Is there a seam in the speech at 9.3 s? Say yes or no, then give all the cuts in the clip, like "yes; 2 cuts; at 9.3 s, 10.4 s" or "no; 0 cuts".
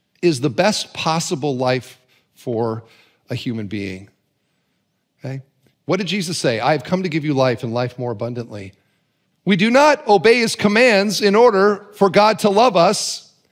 yes; 2 cuts; at 5.7 s, 9.3 s